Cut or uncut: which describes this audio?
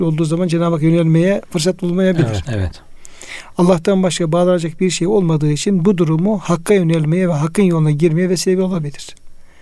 cut